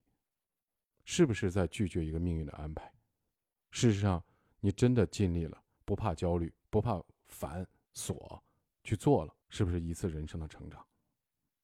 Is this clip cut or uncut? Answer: cut